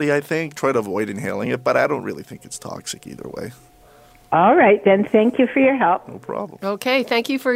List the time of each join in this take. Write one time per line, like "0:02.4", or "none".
none